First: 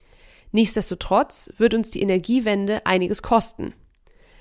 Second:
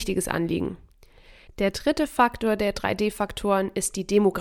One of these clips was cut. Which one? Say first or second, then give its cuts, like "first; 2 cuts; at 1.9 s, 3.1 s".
second; 1 cut; at 1.5 s